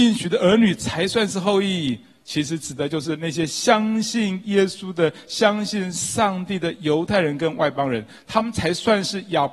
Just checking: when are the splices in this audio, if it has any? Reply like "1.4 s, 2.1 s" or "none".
2.2 s